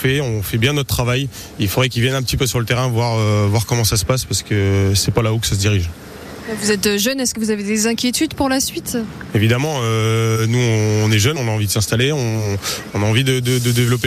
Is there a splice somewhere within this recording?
yes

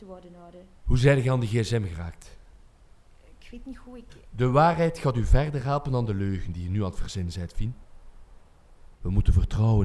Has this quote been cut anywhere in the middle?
yes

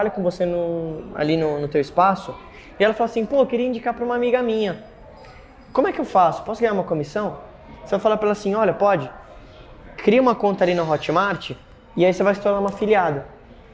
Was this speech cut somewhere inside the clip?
no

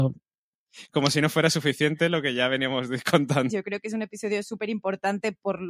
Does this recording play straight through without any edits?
no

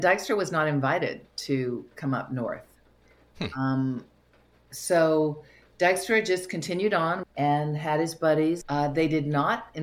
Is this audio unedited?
no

